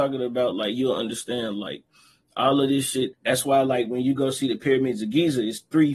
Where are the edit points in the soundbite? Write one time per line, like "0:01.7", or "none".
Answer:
0:03.1

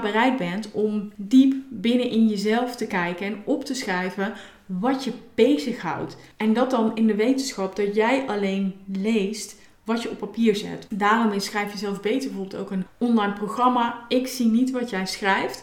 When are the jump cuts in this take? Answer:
0:10.9

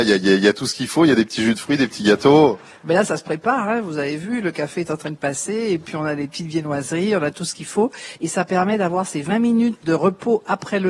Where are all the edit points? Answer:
0:08.2
0:09.8

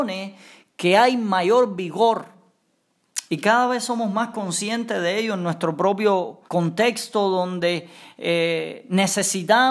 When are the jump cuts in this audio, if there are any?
0:03.3
0:06.5

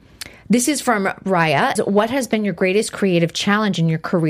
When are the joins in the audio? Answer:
0:01.8

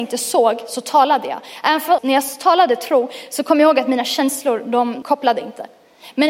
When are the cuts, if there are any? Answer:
0:02.0
0:05.0

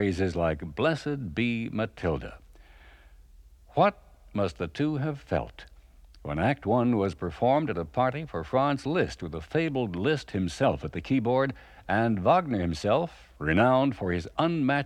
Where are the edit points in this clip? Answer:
none

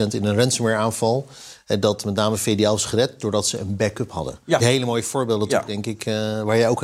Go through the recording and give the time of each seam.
0:04.6

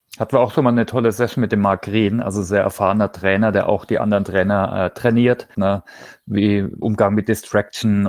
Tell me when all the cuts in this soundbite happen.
0:05.5
0:06.8

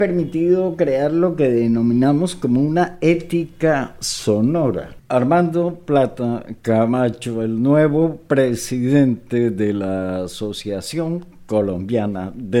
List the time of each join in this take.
0:05.0

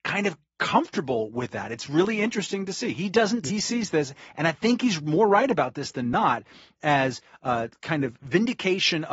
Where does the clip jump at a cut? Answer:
0:03.5

